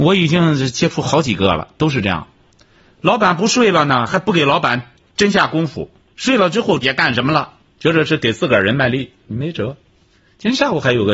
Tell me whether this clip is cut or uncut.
cut